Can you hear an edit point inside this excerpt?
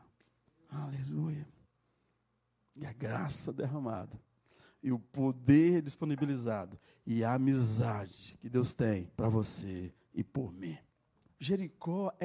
yes; 2 cuts; at 9.1 s, 11.3 s

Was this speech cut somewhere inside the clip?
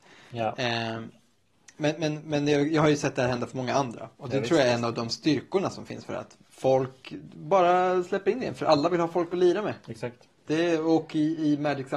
yes; 1 cut; at 6.4 s

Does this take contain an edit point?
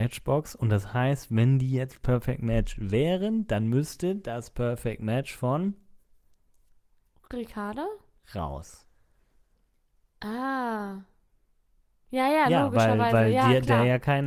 no; 0 cuts

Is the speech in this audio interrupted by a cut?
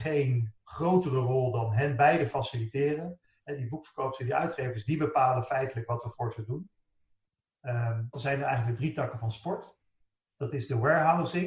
yes; 1 cut; at 8.1 s

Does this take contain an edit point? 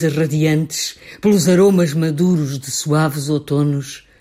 no; 0 cuts

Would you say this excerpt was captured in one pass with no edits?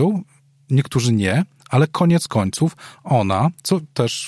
yes; 0 cuts

